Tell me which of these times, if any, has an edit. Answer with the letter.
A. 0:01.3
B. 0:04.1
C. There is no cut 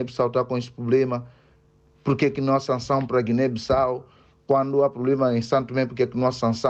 C